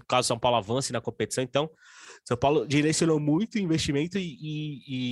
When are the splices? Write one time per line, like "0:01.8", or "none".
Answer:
none